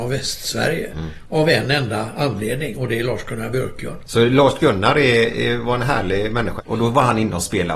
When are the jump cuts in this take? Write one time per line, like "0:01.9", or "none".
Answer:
0:04.0
0:06.6